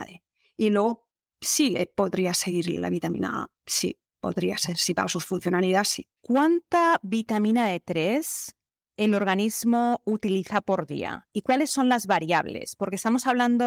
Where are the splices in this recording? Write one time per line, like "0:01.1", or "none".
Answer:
0:06.2